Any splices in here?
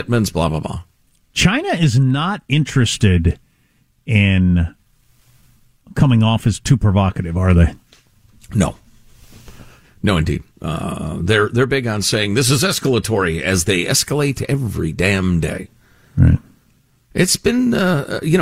no; 0 cuts

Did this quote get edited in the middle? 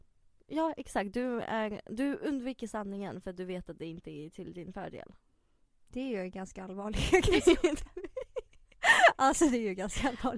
no; 0 cuts

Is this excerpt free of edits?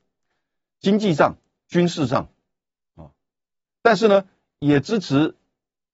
yes; 0 cuts

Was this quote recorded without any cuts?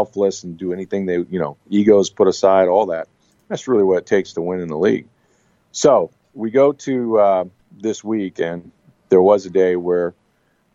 yes; 0 cuts

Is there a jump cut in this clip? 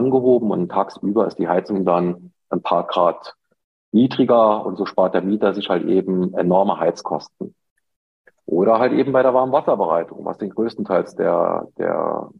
no; 0 cuts

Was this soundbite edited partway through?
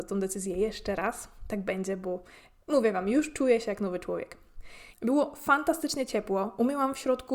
yes; 1 cut; at 4.9 s

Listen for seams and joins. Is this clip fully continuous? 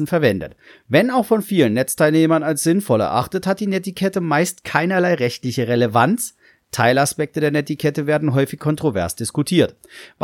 yes; 0 cuts

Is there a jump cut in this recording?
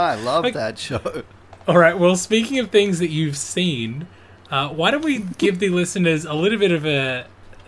no; 0 cuts

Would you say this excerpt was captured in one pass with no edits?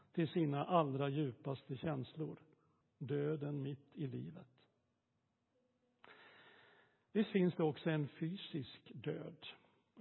no; 1 cut; at 2.8 s

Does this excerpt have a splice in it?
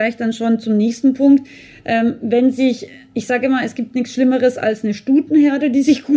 no; 0 cuts

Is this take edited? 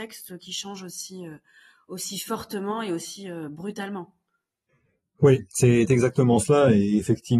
no; 0 cuts

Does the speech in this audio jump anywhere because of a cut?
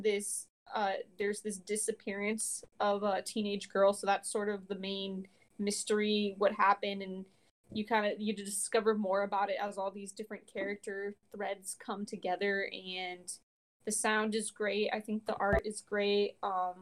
no; 0 cuts

